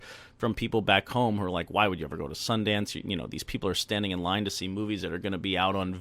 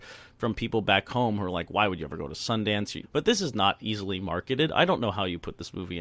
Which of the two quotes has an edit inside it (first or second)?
second